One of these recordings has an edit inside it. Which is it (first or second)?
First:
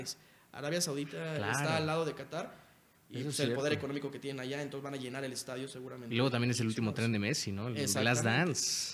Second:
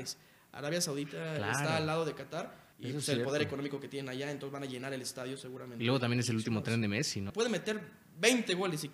second